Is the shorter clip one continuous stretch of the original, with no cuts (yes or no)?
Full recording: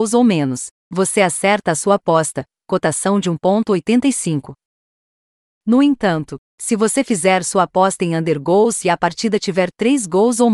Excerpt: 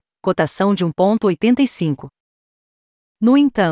yes